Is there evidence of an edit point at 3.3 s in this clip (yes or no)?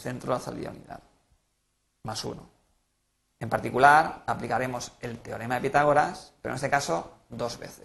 yes